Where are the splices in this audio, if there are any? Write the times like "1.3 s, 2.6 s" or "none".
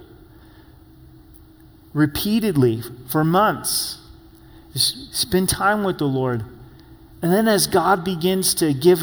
none